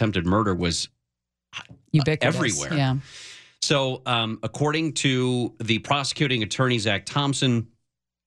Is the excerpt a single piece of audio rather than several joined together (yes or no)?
yes